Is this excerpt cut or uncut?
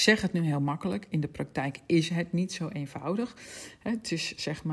uncut